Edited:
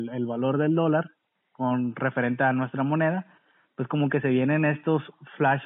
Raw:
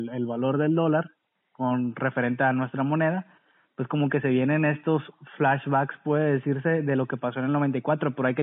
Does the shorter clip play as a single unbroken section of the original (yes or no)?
yes